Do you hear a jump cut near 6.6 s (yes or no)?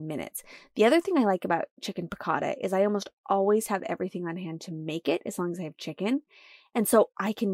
no